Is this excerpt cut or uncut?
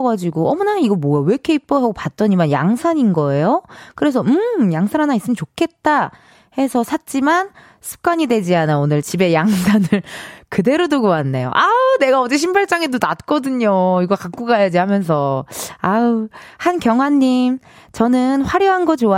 uncut